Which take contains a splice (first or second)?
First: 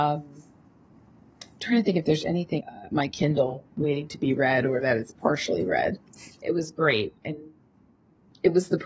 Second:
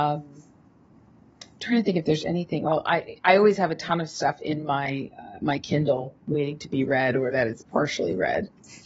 first